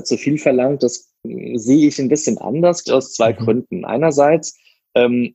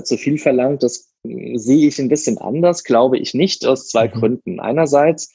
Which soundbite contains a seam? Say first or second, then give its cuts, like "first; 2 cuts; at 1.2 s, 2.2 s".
first; 1 cut; at 2.8 s